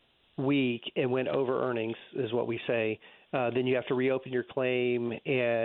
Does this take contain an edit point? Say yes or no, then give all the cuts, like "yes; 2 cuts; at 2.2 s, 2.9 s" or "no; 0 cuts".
no; 0 cuts